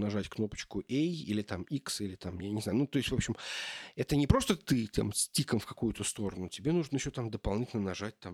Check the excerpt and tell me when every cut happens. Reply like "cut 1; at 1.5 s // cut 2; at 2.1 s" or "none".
none